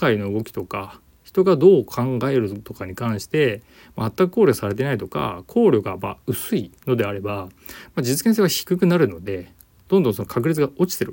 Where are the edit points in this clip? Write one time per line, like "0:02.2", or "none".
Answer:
none